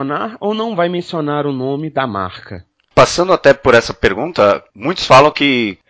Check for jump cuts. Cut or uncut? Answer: uncut